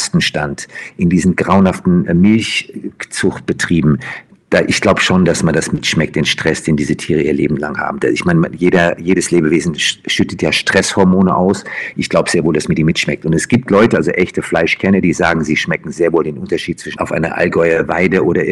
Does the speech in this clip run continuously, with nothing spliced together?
yes; 0 cuts

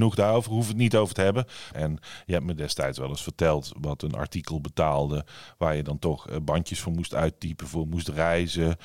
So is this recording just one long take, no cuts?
no; 1 cut; at 1.7 s

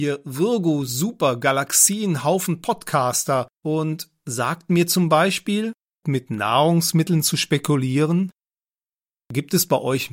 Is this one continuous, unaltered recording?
no; 2 cuts; at 3.5 s, 6.0 s

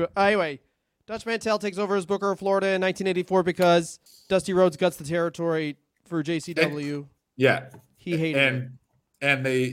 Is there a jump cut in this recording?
no; 0 cuts

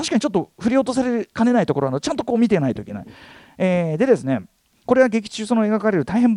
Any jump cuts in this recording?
no; 0 cuts

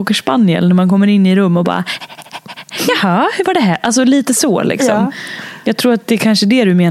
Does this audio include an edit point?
no; 0 cuts

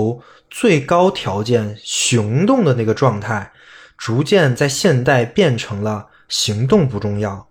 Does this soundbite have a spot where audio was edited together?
no; 0 cuts

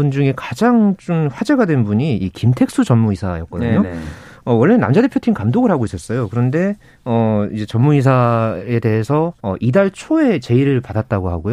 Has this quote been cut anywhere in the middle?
yes; 1 cut; at 9.4 s

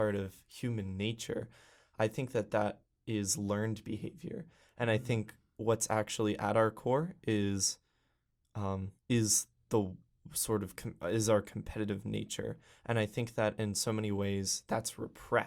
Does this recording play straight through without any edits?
no; 1 cut; at 9.0 s

